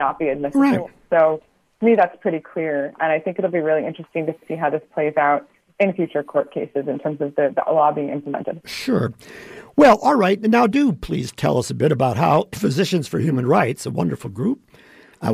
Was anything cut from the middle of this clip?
no; 0 cuts

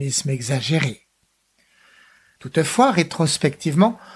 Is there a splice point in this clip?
yes; 1 cut; at 2.4 s

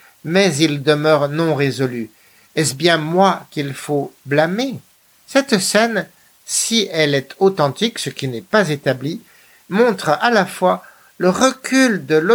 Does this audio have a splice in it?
no; 0 cuts

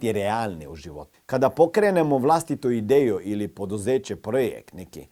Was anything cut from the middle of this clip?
yes; 1 cut; at 1.1 s

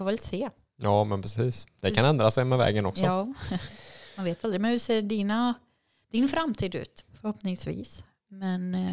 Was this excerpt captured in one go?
no; 1 cut; at 7.0 s

